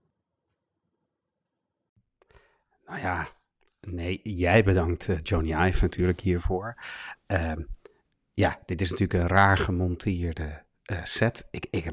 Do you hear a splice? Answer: no; 0 cuts

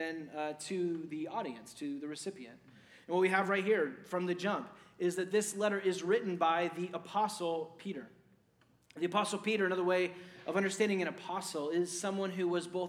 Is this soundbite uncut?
yes; 0 cuts

